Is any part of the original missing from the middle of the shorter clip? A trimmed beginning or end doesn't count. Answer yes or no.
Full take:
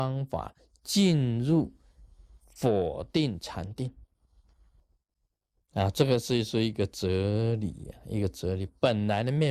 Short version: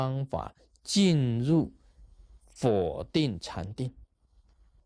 no